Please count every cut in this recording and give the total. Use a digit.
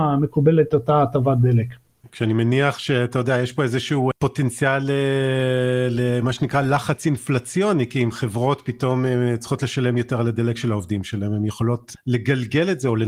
1